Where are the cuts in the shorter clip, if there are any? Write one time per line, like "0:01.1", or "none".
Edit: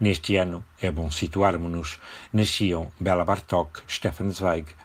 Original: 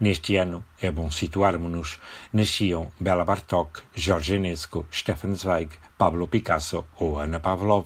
0:03.9

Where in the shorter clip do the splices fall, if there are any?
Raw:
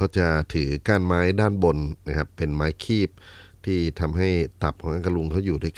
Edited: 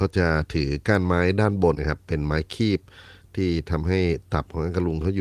0:01.7

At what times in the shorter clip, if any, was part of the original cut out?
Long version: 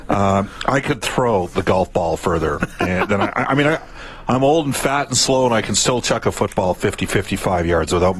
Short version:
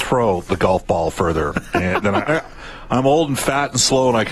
0:02.3

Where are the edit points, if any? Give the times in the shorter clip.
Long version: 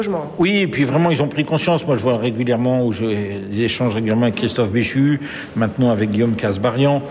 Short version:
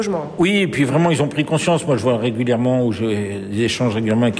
none

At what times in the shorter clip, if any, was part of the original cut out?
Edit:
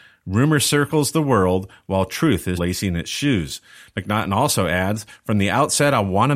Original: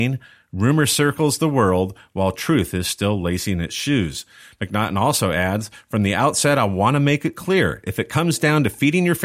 0:02.6

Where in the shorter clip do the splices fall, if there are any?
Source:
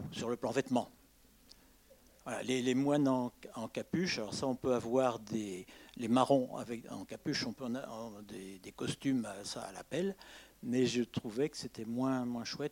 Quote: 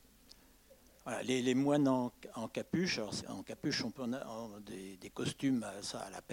0:03.2

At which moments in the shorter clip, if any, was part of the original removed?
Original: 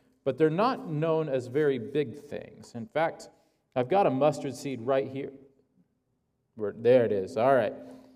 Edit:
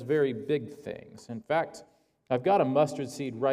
none

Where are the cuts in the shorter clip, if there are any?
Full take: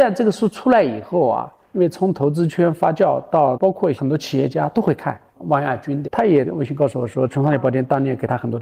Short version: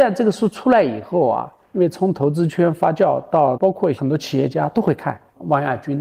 none

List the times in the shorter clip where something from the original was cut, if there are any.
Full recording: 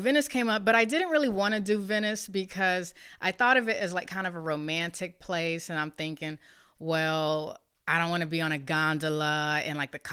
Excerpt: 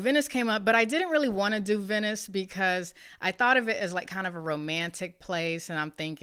none

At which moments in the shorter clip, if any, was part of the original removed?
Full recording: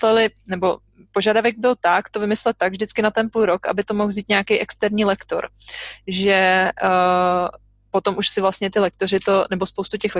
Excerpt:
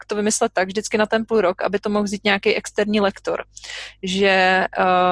none

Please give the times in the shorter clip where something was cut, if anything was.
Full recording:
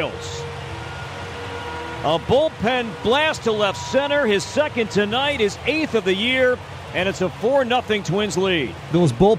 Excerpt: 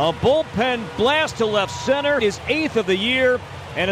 0:02.2

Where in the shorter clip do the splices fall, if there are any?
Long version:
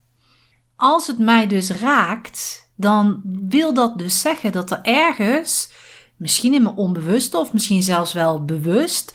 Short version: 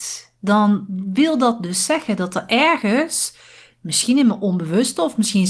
none

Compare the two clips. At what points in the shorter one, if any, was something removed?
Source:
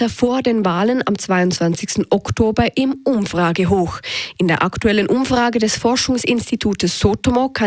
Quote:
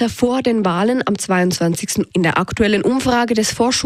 0:02.1

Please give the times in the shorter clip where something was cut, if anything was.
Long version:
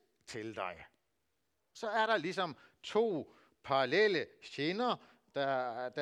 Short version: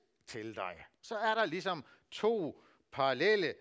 0:01.0

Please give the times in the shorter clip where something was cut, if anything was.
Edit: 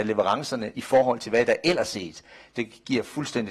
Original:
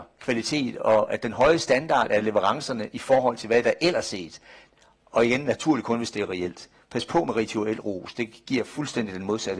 0:02.5

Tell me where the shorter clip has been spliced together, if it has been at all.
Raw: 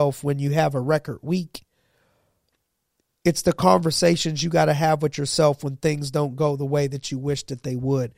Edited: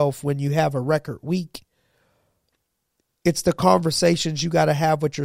none

